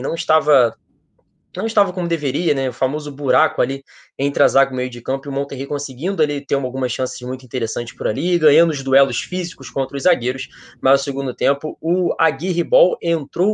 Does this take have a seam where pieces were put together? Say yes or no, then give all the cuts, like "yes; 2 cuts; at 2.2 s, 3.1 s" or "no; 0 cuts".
no; 0 cuts